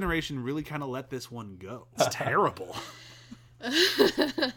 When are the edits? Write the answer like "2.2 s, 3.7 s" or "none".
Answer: 1.9 s